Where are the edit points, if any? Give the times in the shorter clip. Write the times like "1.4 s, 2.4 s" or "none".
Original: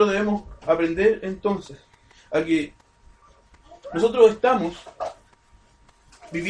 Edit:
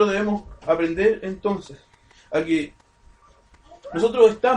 none